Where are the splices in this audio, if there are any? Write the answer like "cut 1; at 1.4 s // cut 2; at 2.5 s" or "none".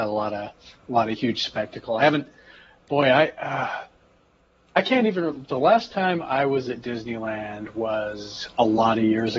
none